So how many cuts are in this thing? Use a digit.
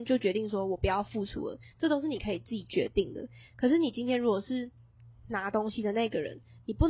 0